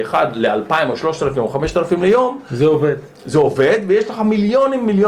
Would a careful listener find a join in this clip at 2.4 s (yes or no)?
no